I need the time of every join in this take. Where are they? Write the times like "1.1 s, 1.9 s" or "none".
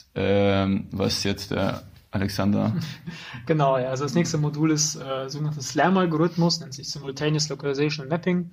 none